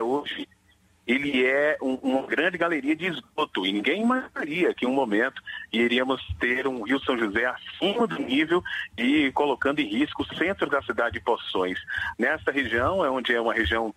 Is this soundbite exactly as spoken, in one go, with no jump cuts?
no; 1 cut; at 12.1 s

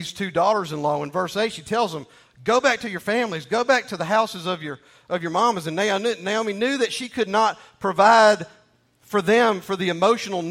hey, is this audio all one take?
yes; 0 cuts

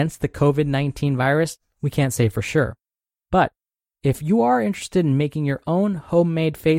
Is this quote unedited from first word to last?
yes; 0 cuts

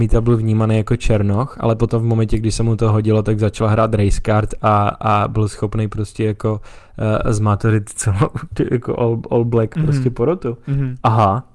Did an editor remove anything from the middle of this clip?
no; 0 cuts

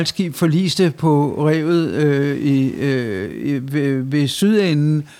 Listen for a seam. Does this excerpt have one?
no; 0 cuts

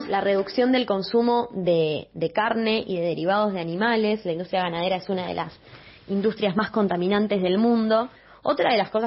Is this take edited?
no; 0 cuts

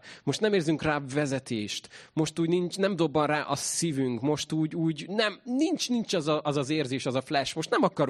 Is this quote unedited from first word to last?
yes; 0 cuts

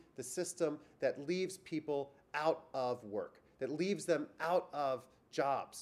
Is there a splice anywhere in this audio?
no; 0 cuts

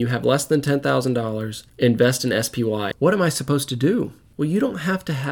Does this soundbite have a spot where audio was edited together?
yes; 1 cut; at 2.9 s

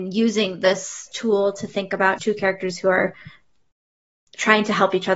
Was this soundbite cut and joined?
yes; 1 cut; at 2.2 s

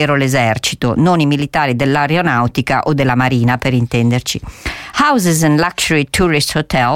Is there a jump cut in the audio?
no; 0 cuts

